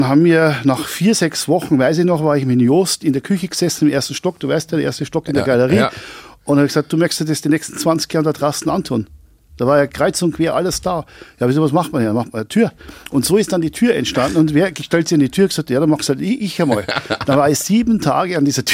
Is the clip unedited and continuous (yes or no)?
yes